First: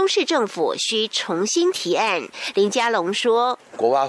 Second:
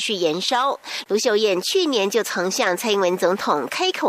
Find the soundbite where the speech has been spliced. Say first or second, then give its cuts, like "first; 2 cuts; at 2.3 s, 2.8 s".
first; 1 cut; at 2.5 s